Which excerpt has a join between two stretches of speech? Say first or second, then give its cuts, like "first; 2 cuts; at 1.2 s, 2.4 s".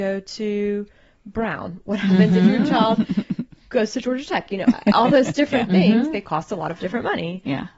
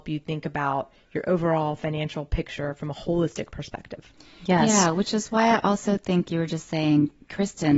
second; 1 cut; at 6.3 s